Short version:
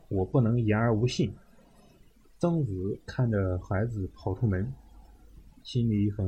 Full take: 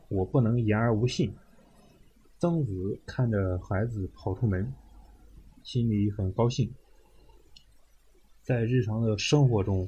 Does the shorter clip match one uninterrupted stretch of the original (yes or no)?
yes